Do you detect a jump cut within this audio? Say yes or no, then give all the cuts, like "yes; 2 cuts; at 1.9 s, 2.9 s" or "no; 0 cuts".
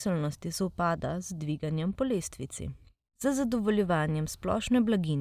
no; 0 cuts